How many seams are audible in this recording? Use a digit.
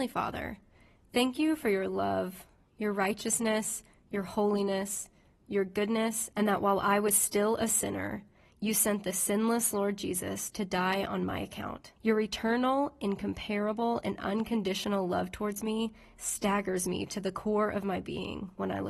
2